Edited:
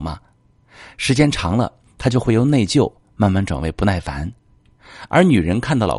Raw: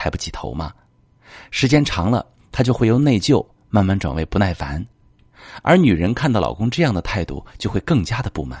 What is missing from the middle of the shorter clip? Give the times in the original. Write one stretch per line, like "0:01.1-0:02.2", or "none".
none